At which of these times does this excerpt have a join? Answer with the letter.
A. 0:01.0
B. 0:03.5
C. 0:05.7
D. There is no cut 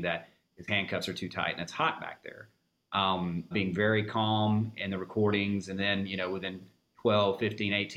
B